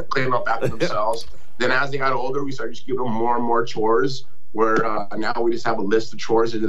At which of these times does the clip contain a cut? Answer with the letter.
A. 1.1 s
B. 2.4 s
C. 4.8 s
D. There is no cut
D